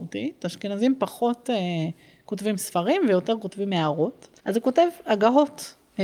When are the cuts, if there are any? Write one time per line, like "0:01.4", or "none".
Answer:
0:04.4